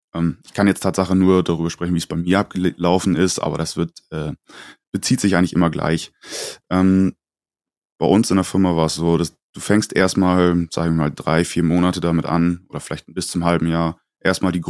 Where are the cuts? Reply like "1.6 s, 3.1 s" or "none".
none